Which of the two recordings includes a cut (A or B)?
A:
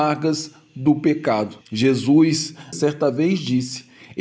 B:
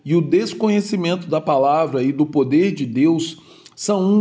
A